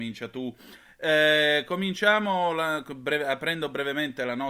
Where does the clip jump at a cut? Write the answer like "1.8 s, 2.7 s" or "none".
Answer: none